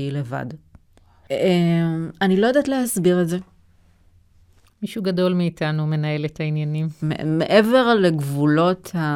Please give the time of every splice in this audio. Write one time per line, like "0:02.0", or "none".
0:04.6
0:07.0